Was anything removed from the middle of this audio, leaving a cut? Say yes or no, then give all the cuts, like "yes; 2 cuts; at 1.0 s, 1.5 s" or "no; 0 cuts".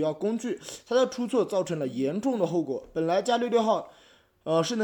no; 0 cuts